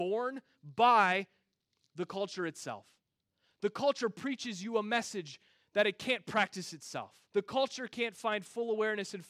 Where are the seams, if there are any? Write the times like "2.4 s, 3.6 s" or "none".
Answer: 7.3 s